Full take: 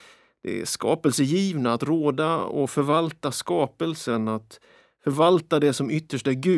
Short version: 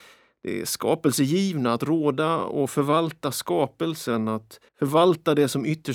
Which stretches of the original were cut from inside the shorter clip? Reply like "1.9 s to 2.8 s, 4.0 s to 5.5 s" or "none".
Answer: 4.7 s to 4.9 s